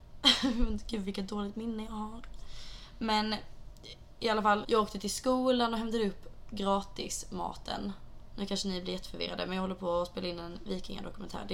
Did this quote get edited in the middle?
yes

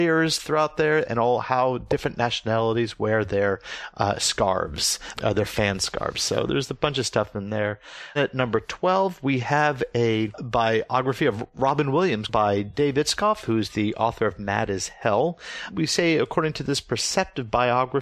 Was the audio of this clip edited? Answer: yes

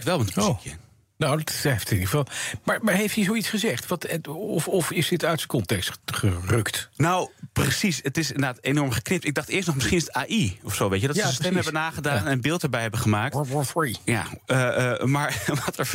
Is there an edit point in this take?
no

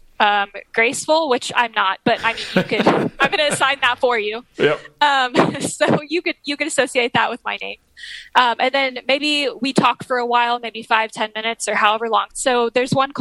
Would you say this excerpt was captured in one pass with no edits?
no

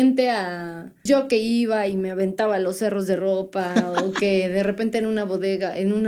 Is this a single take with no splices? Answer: no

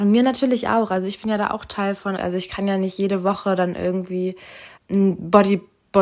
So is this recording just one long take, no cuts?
no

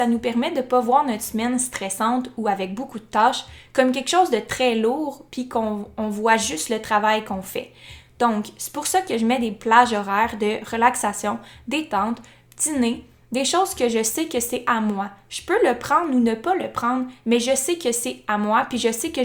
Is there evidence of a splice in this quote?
no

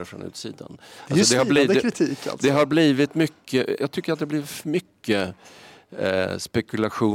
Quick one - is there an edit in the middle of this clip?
yes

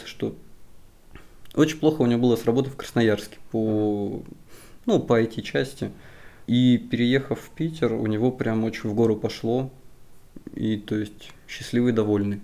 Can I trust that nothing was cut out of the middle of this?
no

